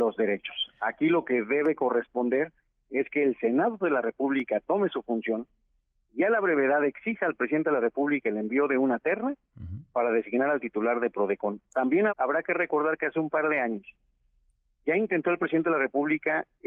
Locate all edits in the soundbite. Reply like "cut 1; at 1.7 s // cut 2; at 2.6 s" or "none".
cut 1; at 12.1 s